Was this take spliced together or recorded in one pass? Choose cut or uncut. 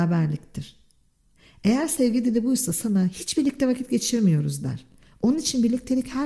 uncut